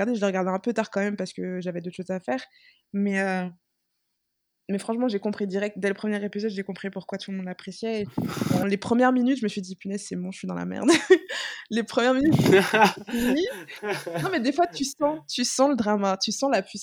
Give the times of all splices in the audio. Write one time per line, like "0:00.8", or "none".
0:08.6

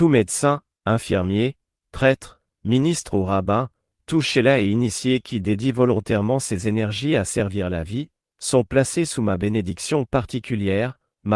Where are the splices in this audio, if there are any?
0:02.5

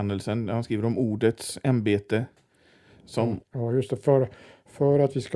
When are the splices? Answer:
0:03.4

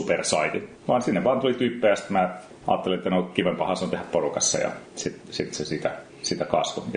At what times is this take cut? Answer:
none

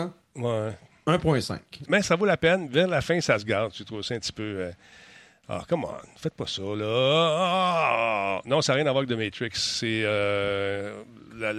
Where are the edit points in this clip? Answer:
0:01.9

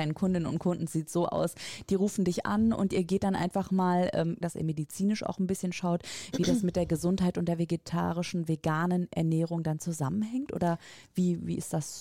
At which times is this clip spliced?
0:04.4

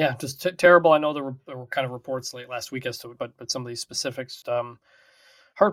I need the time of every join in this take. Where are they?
0:03.2
0:04.4

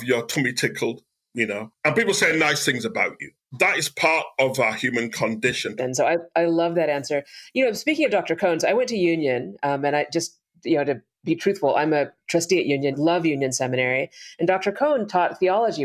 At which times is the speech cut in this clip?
0:05.8
0:12.9

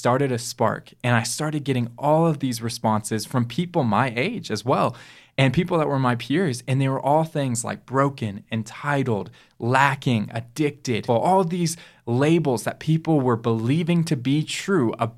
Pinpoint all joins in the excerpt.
0:11.1

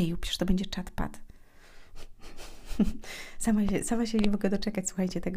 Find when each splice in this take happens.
none

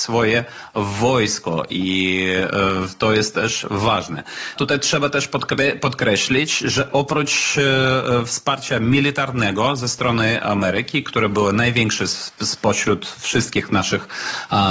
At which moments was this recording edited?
0:04.6

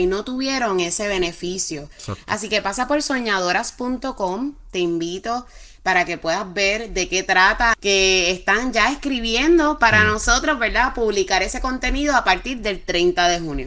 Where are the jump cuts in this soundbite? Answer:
0:07.7

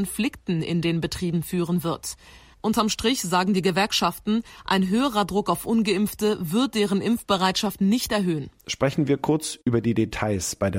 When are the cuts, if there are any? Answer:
none

